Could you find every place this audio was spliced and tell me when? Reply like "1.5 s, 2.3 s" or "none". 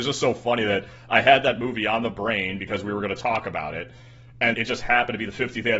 4.5 s